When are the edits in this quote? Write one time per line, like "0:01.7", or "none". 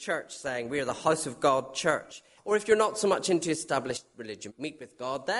0:02.4
0:04.5